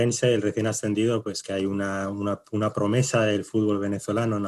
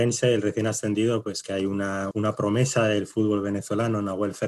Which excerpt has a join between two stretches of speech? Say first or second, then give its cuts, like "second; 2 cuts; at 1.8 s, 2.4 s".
second; 1 cut; at 2.1 s